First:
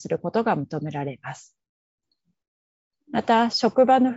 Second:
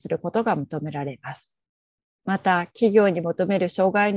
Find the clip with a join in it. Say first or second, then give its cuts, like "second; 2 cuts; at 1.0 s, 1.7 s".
second; 1 cut; at 2.0 s